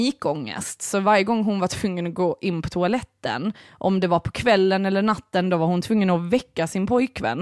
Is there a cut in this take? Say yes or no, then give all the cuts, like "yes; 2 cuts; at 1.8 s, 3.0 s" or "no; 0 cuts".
no; 0 cuts